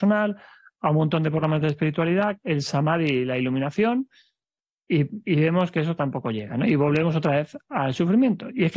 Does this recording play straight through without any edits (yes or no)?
no